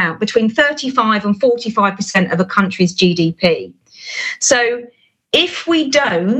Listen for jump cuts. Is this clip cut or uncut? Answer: uncut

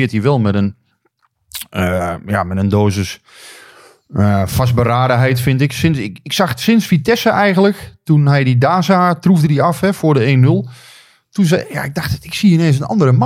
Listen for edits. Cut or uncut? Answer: uncut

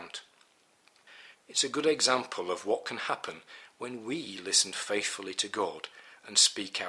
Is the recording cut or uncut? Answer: cut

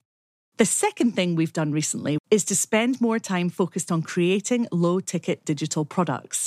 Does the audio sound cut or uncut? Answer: cut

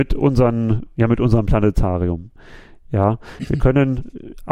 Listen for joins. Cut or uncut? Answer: uncut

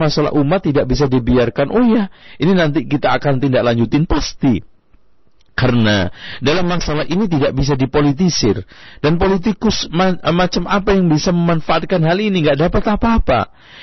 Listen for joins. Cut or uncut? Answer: uncut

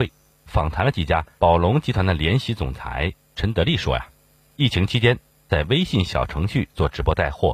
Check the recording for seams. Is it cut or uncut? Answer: cut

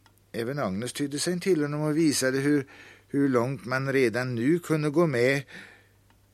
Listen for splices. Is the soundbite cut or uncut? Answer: uncut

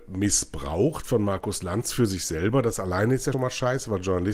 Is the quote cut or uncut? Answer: cut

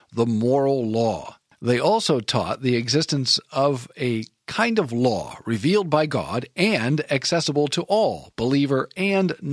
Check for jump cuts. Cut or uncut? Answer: cut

